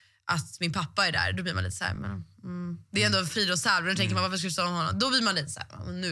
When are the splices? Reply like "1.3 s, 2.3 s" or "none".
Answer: none

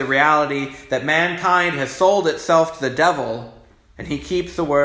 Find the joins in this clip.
4.0 s

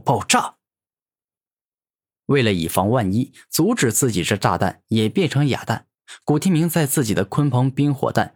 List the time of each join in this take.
none

